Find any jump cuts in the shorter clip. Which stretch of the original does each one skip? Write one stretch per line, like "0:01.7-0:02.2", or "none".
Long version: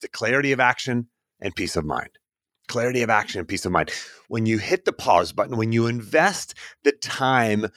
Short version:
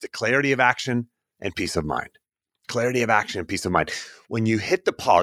none